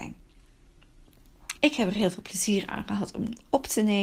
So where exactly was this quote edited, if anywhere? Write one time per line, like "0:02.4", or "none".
0:01.6